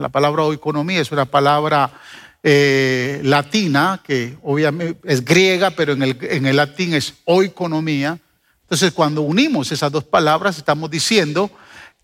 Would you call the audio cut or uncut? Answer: cut